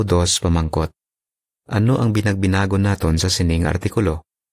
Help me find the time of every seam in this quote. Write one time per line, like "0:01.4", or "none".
none